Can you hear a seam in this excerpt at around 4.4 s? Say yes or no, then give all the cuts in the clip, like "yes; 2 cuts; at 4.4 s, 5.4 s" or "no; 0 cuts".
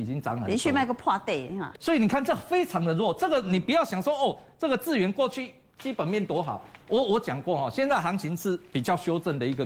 no; 1 cut; at 1.7 s